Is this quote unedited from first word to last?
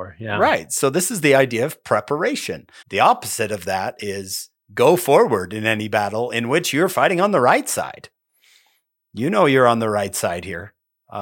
no; 1 cut; at 2.8 s

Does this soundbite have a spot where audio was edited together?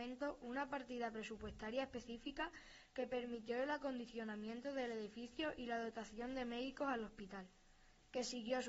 no; 0 cuts

